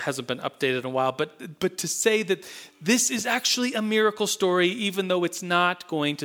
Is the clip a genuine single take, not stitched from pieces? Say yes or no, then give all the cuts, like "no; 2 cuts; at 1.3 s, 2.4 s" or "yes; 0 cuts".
yes; 0 cuts